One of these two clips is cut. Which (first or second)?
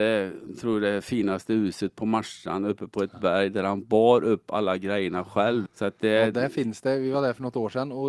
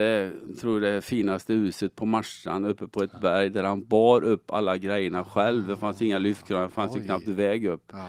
first